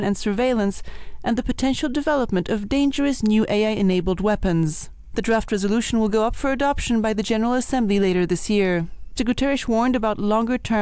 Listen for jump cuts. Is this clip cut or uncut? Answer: cut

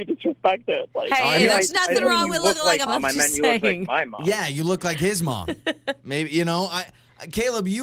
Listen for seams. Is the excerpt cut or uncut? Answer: cut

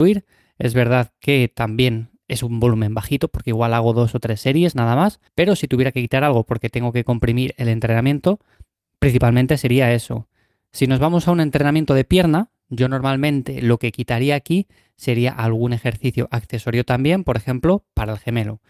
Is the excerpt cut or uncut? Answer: cut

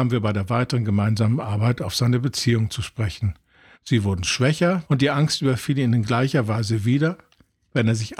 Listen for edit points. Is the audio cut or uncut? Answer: cut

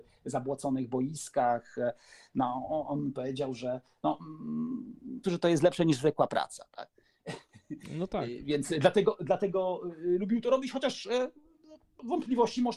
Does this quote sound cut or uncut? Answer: cut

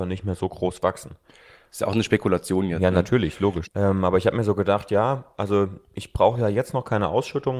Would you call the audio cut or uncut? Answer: cut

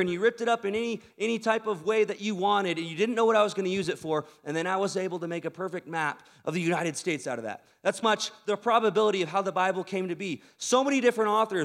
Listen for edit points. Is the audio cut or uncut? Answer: cut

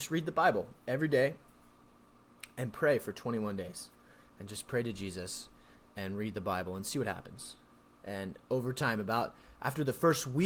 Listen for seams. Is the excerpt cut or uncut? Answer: uncut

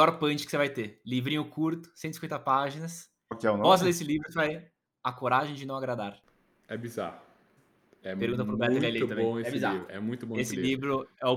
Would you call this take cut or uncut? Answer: uncut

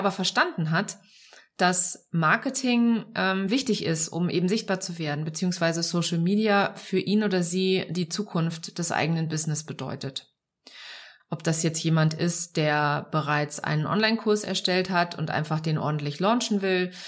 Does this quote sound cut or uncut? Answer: cut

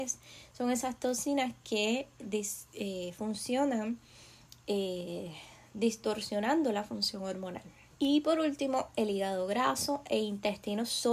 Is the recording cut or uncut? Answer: cut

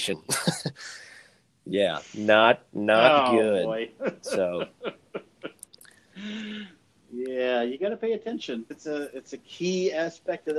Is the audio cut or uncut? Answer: cut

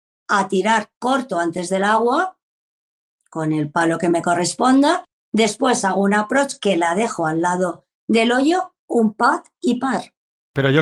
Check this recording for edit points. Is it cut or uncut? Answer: uncut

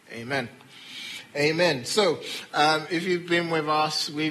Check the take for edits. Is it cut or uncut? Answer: uncut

